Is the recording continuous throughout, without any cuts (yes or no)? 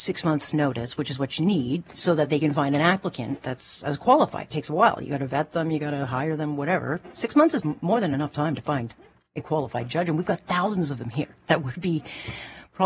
yes